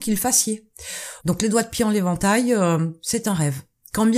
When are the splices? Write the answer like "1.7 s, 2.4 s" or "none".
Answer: 1.2 s